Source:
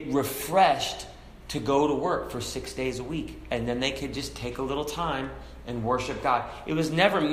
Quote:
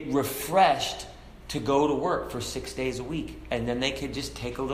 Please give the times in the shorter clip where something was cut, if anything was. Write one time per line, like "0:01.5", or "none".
none